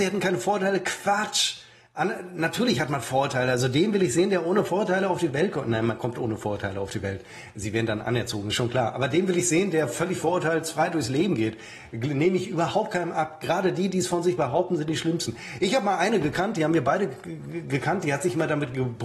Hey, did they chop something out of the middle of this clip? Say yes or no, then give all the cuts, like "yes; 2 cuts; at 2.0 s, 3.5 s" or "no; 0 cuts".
no; 0 cuts